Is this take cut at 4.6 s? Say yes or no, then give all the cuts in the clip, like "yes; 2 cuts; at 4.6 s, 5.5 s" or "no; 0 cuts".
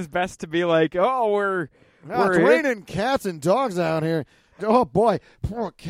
yes; 1 cut; at 4.6 s